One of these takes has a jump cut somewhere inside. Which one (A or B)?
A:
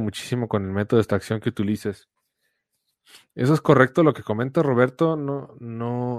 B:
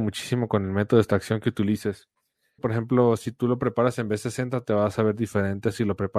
B